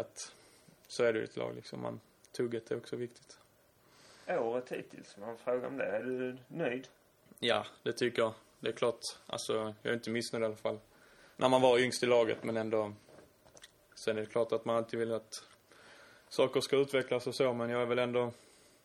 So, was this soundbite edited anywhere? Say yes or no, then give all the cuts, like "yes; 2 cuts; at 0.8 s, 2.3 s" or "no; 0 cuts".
yes; 2 cuts; at 11.3 s, 13.9 s